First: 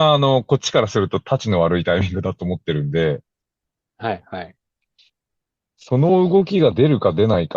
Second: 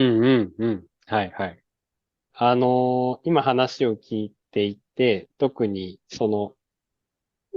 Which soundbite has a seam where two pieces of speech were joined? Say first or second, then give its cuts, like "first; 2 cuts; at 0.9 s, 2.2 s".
second; 2 cuts; at 2.3 s, 6.0 s